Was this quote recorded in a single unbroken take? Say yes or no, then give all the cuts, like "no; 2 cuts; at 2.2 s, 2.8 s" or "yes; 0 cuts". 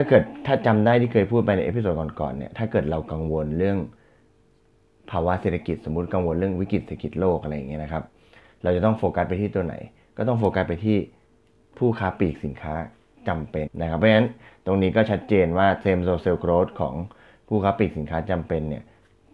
no; 1 cut; at 13.7 s